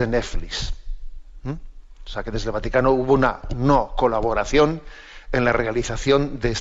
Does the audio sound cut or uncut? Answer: uncut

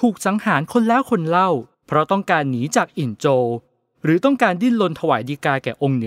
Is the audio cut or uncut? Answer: cut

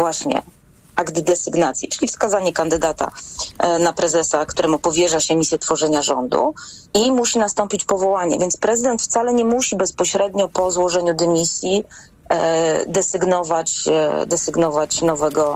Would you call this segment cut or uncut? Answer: uncut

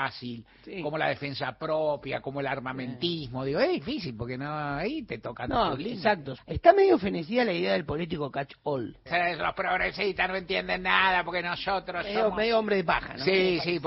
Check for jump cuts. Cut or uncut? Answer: cut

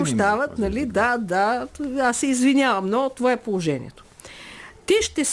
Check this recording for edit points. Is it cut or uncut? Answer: uncut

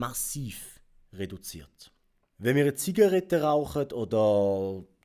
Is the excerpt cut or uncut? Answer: cut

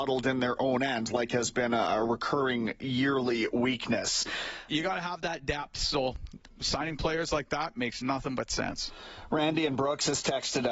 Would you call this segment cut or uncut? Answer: cut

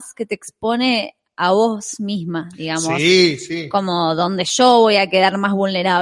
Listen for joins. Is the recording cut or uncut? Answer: uncut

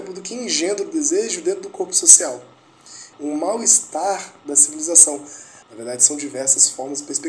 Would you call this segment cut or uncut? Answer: cut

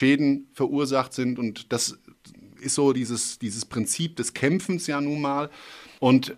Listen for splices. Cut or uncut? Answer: uncut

